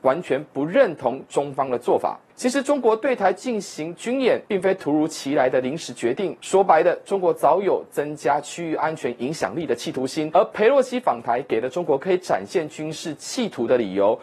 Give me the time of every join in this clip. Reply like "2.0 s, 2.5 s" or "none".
none